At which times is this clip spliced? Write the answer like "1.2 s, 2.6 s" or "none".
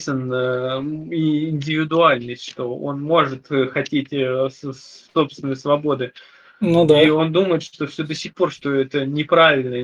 none

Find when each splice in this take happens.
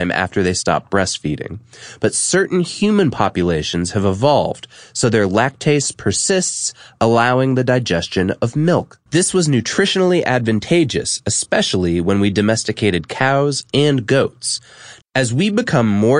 9.1 s, 15.0 s

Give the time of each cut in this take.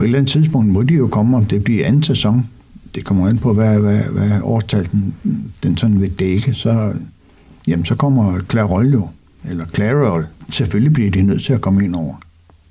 none

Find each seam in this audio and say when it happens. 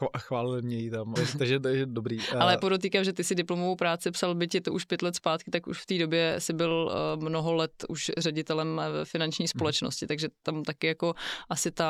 1.2 s

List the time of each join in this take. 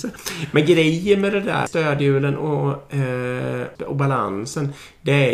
1.7 s, 3.8 s

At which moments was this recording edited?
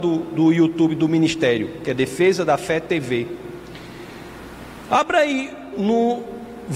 5.7 s

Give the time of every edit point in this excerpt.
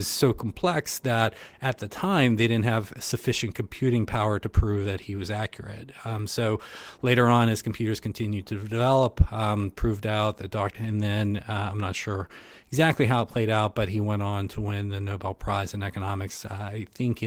10.7 s

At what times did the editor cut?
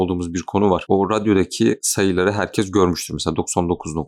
none

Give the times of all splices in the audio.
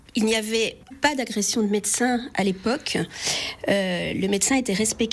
0.9 s

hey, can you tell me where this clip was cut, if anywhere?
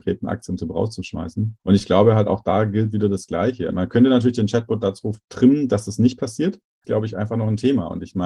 3.7 s, 6.8 s

